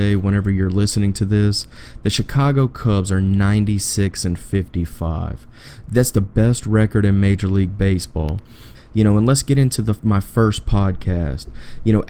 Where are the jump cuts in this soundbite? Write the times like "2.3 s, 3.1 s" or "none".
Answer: 8.7 s